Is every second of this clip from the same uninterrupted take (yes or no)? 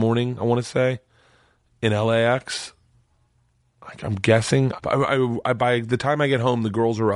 no